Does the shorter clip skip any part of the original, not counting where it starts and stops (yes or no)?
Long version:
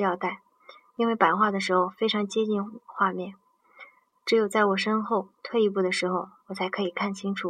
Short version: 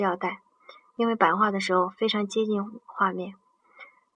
no